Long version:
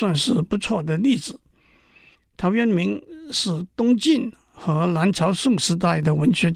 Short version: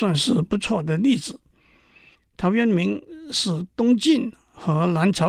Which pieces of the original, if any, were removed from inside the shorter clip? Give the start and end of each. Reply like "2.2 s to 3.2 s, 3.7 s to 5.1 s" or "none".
none